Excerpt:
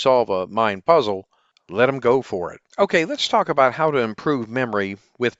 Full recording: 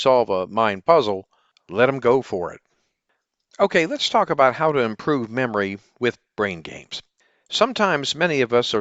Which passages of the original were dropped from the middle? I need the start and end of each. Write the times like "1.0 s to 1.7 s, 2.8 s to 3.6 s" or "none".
2.7 s to 3.5 s